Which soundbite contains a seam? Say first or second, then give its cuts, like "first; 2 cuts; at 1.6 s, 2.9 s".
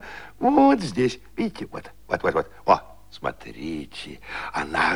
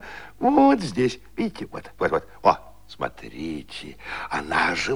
second; 1 cut; at 2.0 s